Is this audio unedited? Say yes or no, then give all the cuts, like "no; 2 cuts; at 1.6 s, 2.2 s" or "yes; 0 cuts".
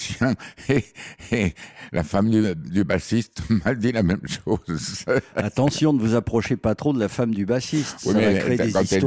yes; 0 cuts